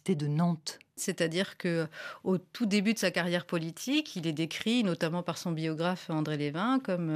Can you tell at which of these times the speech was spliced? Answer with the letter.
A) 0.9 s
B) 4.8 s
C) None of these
C